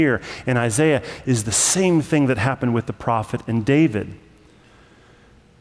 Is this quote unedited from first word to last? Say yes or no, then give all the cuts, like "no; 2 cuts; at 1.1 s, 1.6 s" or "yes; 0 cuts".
yes; 0 cuts